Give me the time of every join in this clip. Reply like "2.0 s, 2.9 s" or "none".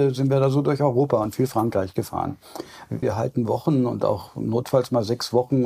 3.0 s